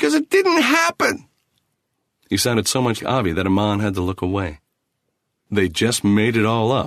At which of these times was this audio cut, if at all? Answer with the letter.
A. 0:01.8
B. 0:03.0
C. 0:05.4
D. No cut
B